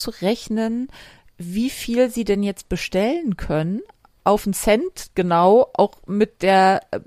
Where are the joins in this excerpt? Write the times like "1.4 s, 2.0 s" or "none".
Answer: none